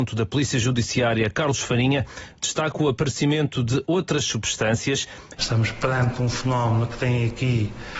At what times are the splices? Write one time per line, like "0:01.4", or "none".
0:05.4